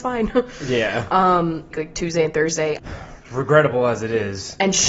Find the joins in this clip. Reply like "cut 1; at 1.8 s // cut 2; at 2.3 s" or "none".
cut 1; at 1.7 s // cut 2; at 2.8 s

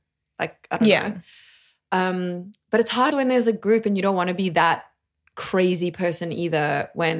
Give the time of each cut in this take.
cut 1; at 3.1 s

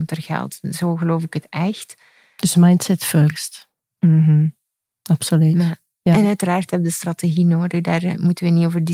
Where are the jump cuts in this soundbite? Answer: none

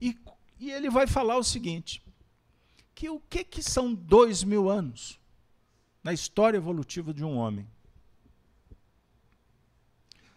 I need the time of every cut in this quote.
none

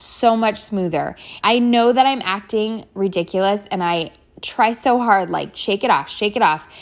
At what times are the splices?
cut 1; at 1.4 s

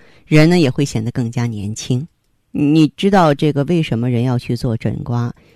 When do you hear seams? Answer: cut 1; at 2.4 s

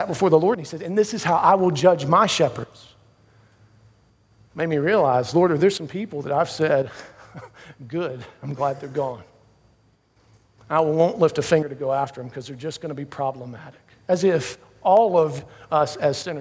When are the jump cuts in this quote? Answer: none

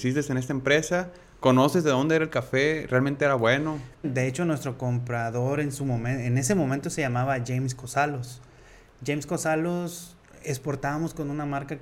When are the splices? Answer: cut 1; at 4.0 s

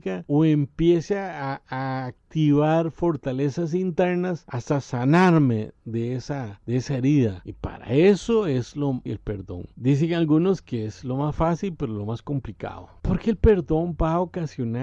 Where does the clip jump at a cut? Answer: cut 1; at 9.1 s

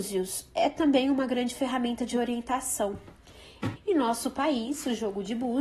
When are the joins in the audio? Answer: cut 1; at 3.8 s

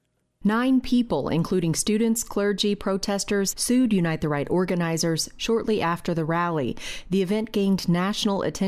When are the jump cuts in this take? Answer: cut 1; at 3.5 s

